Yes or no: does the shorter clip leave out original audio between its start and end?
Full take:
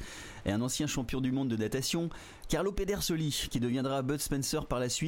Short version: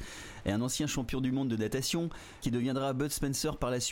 yes